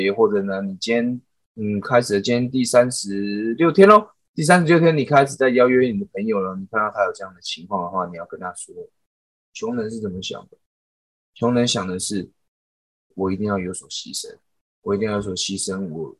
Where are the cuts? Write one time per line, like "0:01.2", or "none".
0:13.1